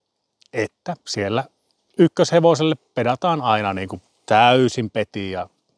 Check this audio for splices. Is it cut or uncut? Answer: uncut